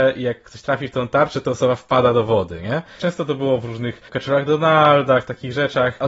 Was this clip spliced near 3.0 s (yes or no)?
yes